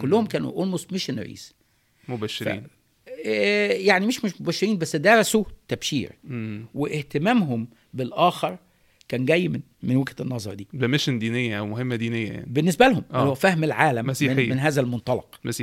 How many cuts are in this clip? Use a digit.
0